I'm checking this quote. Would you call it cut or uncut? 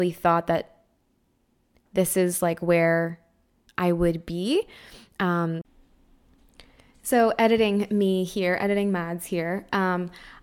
uncut